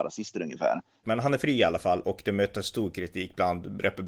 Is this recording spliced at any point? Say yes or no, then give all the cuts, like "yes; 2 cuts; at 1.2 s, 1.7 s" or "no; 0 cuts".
yes; 1 cut; at 1.0 s